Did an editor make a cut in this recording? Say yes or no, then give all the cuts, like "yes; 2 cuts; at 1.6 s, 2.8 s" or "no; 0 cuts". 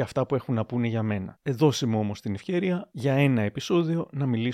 no; 0 cuts